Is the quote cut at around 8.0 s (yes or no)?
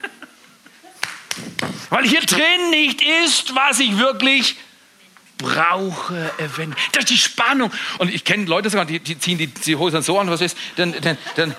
yes